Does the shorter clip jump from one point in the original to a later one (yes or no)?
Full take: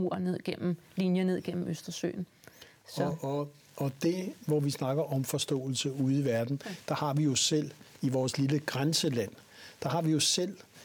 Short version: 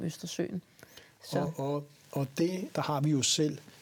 yes